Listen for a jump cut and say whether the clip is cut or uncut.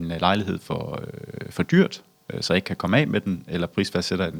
uncut